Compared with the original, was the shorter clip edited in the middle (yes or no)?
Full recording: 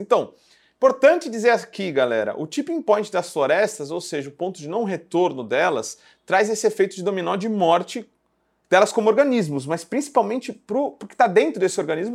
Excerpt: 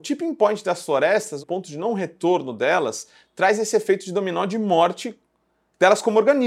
yes